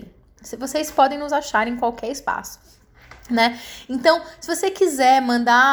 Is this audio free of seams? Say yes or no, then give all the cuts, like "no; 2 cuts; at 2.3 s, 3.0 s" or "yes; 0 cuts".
yes; 0 cuts